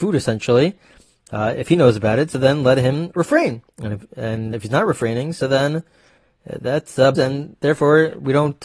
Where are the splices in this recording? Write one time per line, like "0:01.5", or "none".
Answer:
0:04.5
0:07.1